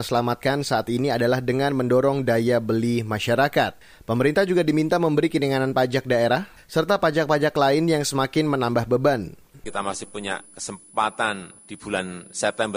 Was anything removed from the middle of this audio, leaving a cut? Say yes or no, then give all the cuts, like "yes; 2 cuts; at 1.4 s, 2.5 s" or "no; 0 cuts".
yes; 2 cuts; at 6.6 s, 9.5 s